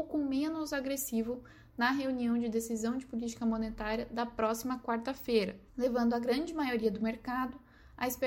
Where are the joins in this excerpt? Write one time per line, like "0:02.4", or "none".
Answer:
0:05.7

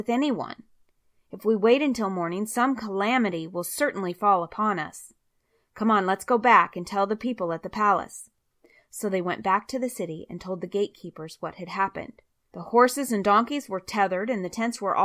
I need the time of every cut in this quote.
0:12.5

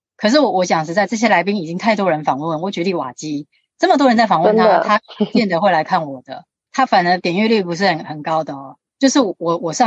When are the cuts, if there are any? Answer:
0:08.9

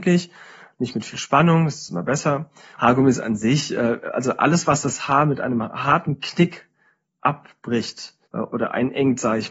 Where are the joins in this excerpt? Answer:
0:02.8
0:08.2

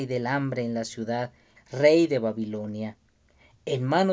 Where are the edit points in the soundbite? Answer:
0:01.6

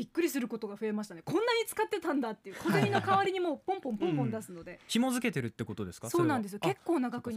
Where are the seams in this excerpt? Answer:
none

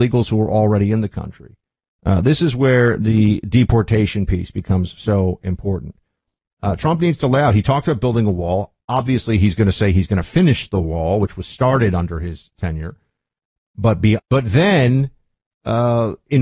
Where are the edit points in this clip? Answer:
0:14.2

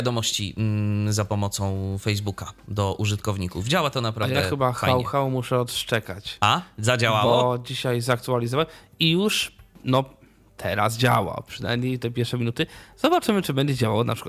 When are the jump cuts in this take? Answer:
none

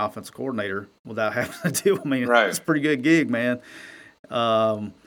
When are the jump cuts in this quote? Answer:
none

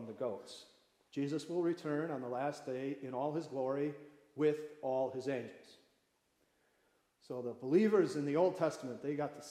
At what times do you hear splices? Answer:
0:01.1

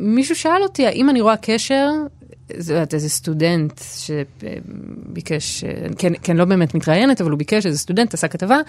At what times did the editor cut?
none

